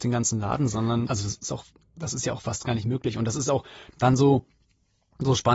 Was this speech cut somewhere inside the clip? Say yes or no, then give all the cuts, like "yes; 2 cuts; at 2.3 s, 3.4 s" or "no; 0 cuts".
yes; 1 cut; at 1.1 s